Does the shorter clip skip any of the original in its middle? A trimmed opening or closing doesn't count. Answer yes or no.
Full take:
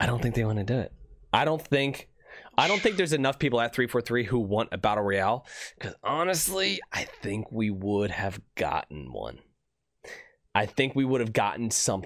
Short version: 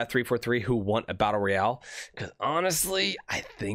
no